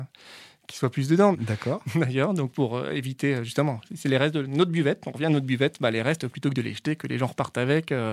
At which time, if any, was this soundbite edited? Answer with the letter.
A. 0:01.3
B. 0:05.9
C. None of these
A